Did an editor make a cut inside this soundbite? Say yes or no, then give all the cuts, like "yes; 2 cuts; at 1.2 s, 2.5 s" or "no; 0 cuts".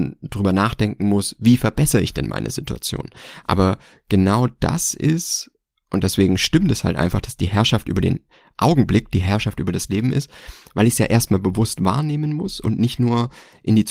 no; 0 cuts